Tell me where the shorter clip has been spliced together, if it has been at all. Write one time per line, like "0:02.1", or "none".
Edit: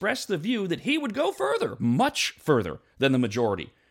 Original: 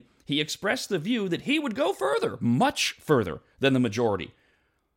none